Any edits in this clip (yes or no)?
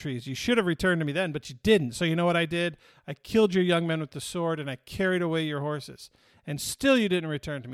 no